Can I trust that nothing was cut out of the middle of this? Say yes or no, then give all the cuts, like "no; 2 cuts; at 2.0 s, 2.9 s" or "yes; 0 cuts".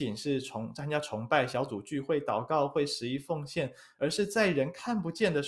yes; 0 cuts